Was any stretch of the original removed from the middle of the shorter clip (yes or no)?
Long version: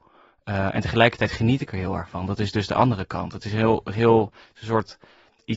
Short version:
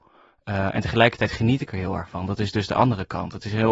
no